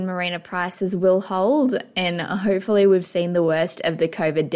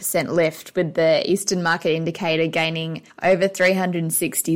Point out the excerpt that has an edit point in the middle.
second; 1 cut; at 3.1 s

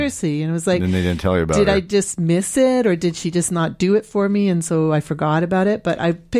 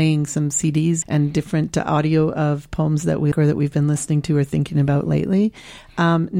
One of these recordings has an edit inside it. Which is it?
second; 2 cuts; at 1.0 s, 3.3 s

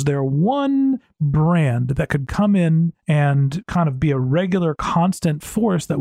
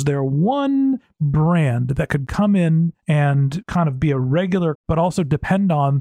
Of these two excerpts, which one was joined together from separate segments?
second; 1 cut; at 4.7 s

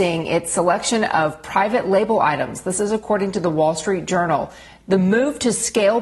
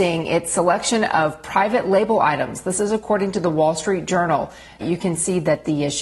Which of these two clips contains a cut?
second; 1 cut; at 4.8 s

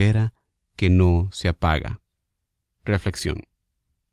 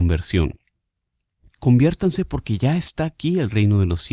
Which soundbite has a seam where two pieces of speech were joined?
first; 1 cut; at 2.7 s

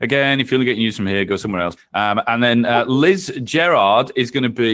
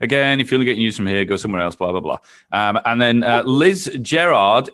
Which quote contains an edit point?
first; 1 cut; at 1.8 s

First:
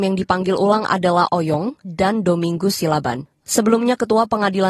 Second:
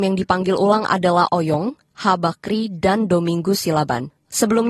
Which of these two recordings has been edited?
first; 1 cut; at 1.8 s

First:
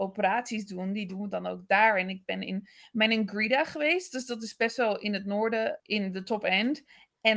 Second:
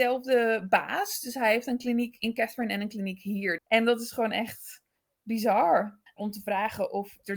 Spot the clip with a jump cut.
second; 2 cuts; at 3.6 s, 6.1 s

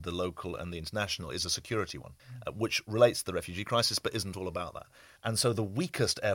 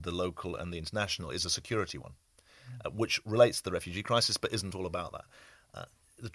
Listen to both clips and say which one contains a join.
first; 2 cuts; at 2.2 s, 5.2 s

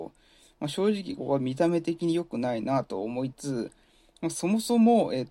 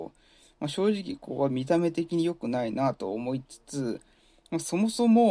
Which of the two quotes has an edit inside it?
first; 2 cuts; at 1.2 s, 3.3 s

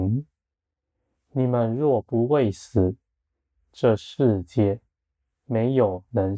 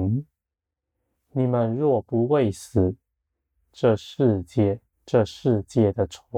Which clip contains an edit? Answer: second; 1 cut; at 4.9 s

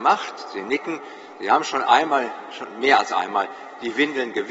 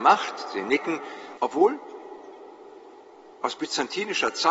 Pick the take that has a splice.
second; 1 cut; at 1.3 s

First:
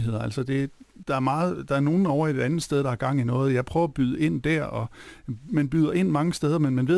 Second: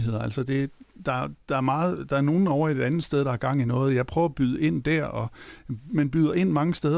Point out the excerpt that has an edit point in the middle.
first; 1 cut; at 1.0 s

